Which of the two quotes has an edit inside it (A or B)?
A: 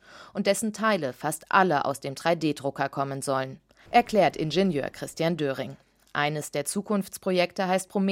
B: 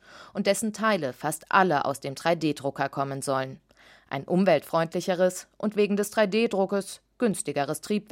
A